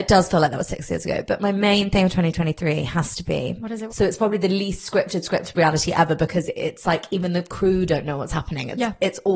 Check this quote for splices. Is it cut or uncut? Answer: cut